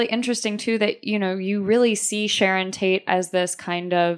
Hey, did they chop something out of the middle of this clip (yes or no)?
no